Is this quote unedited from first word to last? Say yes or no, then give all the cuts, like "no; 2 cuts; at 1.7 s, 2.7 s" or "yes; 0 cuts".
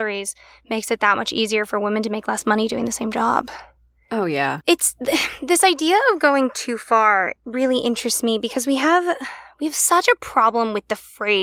no; 1 cut; at 4.6 s